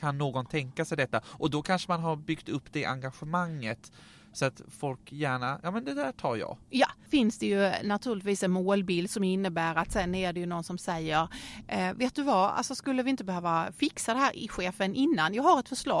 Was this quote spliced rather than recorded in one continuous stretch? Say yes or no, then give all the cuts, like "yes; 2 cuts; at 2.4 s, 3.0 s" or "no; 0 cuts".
yes; 1 cut; at 7.1 s